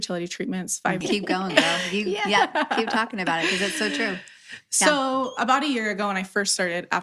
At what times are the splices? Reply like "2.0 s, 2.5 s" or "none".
1.0 s

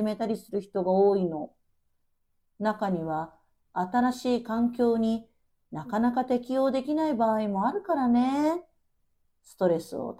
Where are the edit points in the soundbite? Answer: none

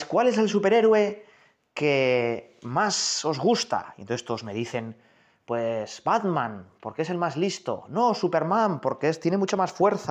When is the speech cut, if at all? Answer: none

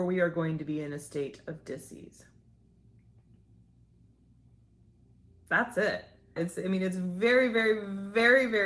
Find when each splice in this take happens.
6.4 s

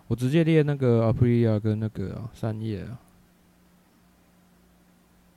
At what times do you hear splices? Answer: none

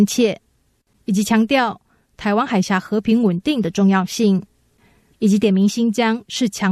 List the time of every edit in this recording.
5.1 s

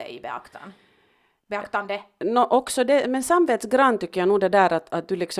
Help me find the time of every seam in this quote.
none

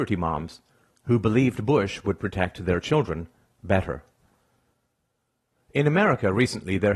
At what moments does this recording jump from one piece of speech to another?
none

